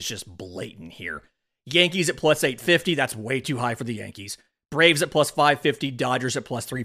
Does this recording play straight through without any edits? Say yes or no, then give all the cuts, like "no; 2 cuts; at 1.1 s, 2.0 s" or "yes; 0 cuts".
yes; 0 cuts